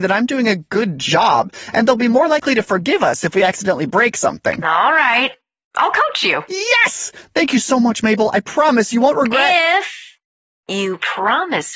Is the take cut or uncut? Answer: uncut